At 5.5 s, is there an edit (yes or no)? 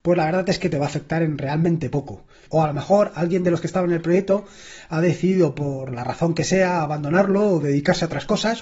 no